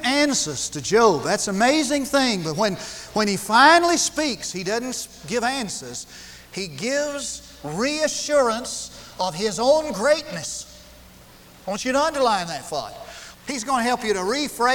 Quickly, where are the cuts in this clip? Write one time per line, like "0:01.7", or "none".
0:13.3